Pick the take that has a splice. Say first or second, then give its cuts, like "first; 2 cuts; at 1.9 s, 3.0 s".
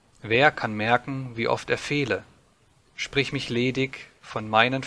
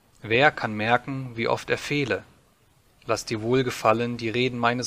second; 1 cut; at 2.9 s